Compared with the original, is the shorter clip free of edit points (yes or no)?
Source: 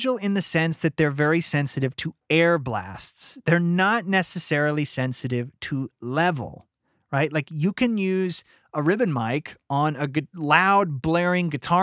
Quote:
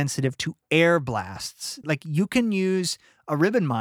no